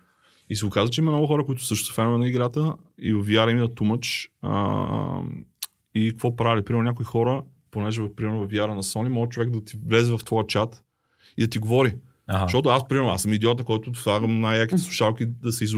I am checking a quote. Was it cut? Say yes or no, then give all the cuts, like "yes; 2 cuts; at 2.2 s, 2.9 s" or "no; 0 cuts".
no; 0 cuts